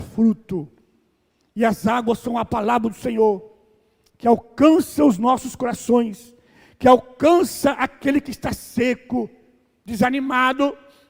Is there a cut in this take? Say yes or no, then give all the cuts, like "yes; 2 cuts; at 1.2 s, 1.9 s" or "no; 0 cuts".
no; 0 cuts